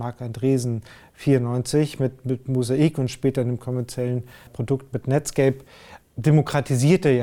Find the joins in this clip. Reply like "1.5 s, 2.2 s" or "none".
4.5 s, 6.0 s